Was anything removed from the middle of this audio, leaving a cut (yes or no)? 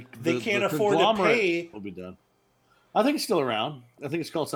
yes